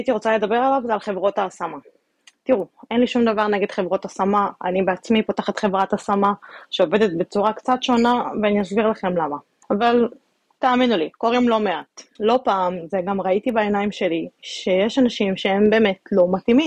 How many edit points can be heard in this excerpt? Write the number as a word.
two